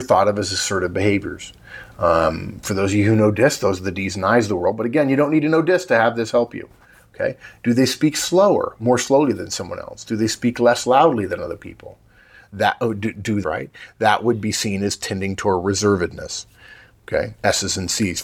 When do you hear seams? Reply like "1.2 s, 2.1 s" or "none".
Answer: 13.4 s